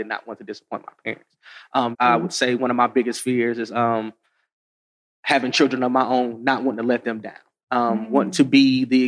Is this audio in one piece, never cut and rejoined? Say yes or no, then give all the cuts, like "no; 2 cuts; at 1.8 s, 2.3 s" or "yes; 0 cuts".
no; 1 cut; at 1.9 s